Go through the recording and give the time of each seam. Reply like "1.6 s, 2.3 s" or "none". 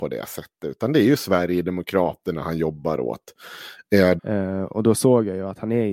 4.2 s